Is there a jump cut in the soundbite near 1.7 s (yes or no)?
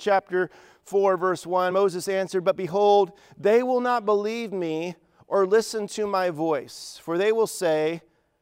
no